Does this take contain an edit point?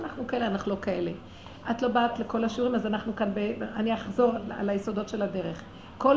no; 0 cuts

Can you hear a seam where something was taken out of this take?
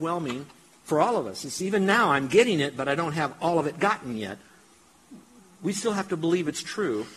no; 0 cuts

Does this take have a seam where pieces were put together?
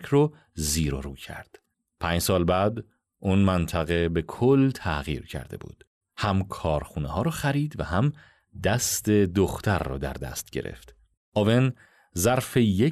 yes; 2 cuts; at 6.0 s, 11.2 s

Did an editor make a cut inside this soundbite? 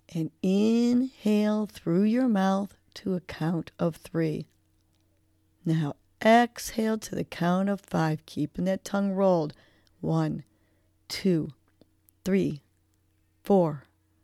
yes; 1 cut; at 5.6 s

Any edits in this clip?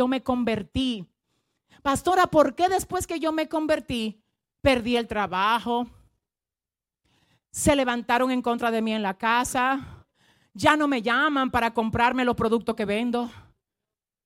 no; 0 cuts

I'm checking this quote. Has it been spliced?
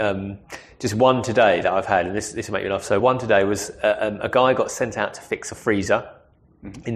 no; 0 cuts

